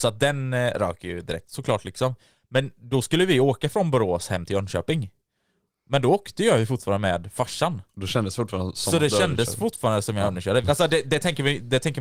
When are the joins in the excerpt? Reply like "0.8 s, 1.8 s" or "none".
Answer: 7.9 s, 10.6 s